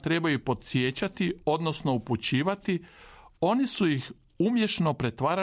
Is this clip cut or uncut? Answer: uncut